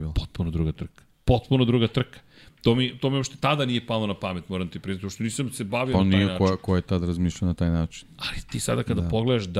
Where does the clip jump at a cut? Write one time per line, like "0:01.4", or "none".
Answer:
0:01.1